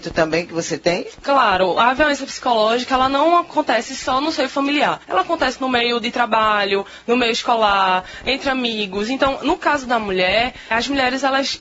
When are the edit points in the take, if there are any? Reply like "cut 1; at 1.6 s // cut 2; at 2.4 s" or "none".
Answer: cut 1; at 10.7 s